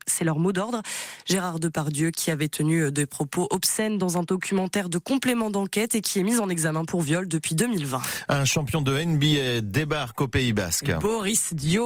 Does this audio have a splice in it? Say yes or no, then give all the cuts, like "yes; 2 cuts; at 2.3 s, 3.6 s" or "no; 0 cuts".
no; 0 cuts